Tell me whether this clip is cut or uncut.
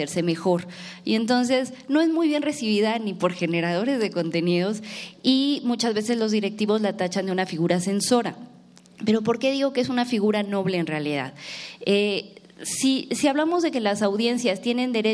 uncut